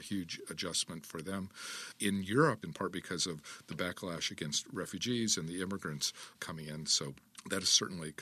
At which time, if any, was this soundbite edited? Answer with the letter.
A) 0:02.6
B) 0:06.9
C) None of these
A